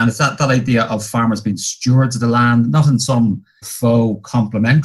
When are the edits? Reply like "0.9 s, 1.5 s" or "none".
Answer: 3.6 s